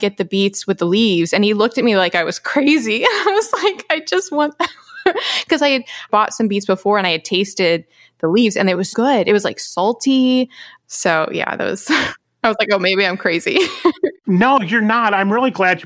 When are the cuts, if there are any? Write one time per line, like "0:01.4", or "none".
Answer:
0:08.9